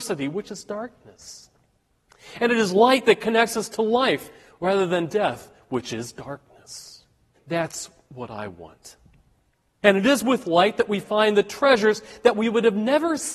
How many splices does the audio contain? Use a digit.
2